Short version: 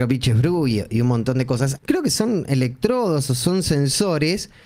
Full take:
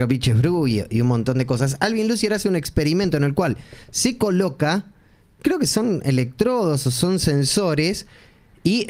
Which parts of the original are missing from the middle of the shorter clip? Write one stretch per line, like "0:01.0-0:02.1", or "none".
0:01.8-0:05.3